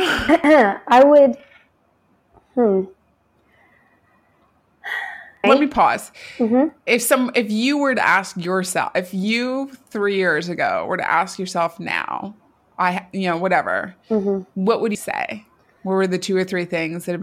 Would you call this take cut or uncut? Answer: cut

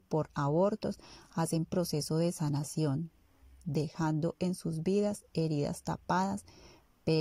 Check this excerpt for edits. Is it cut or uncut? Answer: uncut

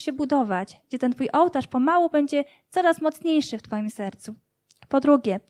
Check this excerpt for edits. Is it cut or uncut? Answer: uncut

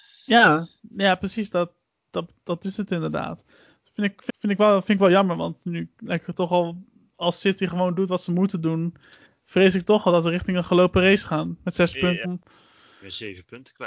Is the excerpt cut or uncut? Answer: cut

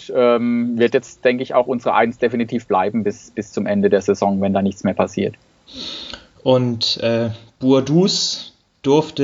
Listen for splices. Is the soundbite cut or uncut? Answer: uncut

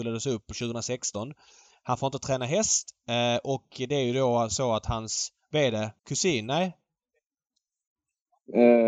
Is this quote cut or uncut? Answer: cut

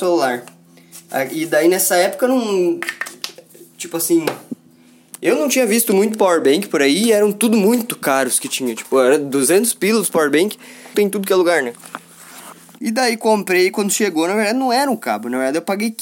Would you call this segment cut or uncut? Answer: cut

